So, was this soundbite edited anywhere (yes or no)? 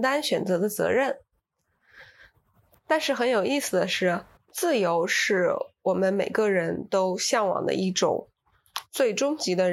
yes